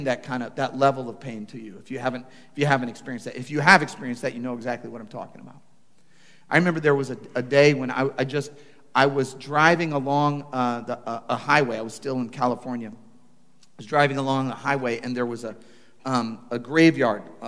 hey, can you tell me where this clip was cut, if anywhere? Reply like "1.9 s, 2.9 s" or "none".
none